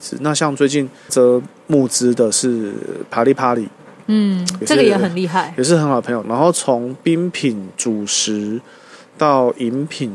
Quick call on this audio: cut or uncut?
cut